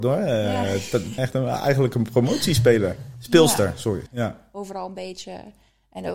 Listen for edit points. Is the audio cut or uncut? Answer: cut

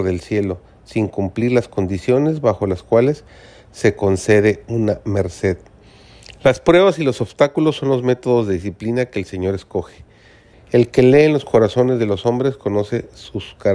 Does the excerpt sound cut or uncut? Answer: cut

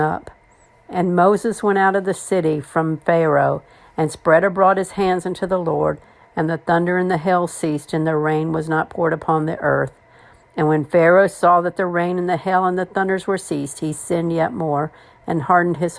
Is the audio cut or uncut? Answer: uncut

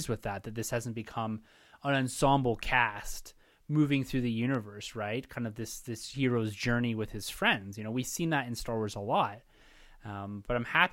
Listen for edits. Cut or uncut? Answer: uncut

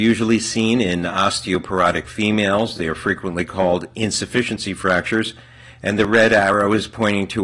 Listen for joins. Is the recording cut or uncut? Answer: uncut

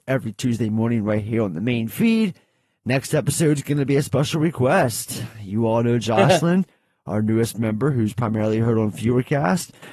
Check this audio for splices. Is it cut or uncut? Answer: uncut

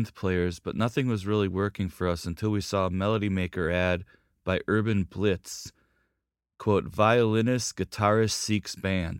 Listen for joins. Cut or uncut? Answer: uncut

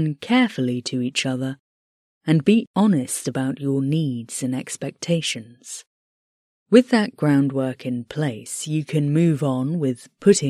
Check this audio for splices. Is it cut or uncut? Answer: uncut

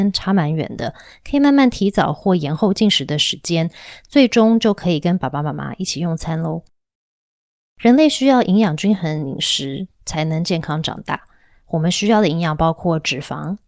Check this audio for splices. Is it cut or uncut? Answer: uncut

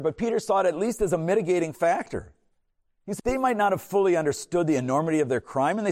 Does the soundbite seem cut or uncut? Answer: cut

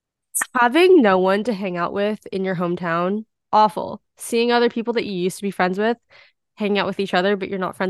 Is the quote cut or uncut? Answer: cut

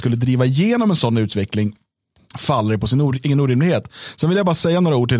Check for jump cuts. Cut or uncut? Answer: uncut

